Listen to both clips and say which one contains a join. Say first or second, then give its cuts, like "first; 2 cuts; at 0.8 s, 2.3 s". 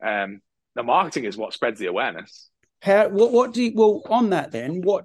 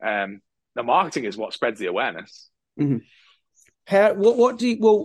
first; 1 cut; at 2.6 s